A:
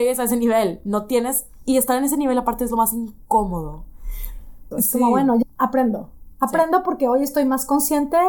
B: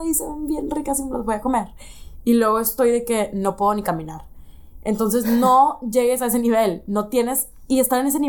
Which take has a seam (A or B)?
A